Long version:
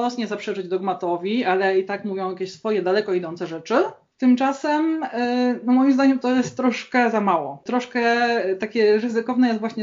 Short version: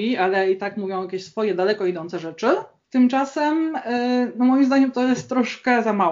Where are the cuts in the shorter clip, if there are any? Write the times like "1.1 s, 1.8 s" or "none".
none